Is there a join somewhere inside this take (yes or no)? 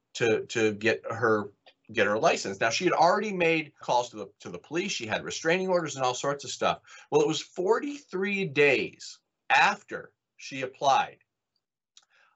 yes